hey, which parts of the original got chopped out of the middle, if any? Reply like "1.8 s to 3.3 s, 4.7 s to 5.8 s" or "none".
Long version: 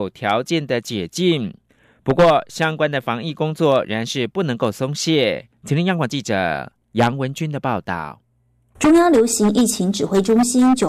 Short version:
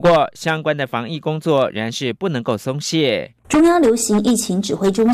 5.5 s to 8.7 s